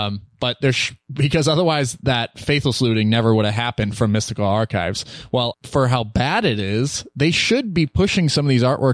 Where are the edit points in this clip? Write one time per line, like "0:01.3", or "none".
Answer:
0:05.5